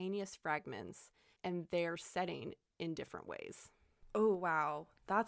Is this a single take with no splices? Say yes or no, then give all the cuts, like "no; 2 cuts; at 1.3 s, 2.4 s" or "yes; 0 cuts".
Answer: yes; 0 cuts